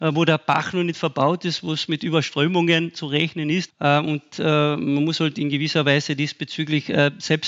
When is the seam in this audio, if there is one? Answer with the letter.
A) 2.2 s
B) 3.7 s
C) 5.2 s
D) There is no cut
B